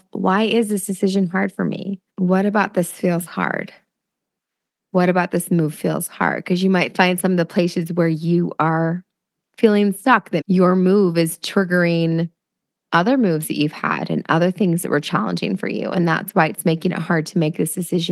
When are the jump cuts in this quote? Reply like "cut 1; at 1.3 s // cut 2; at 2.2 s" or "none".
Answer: cut 1; at 2.1 s // cut 2; at 10.4 s